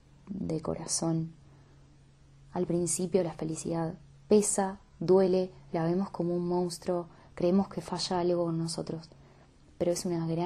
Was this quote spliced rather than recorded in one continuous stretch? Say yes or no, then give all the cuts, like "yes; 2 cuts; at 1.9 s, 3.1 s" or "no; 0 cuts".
no; 0 cuts